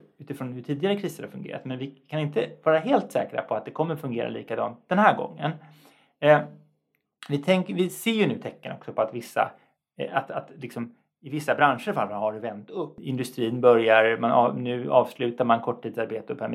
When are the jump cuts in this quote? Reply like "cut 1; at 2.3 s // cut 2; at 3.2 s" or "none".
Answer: none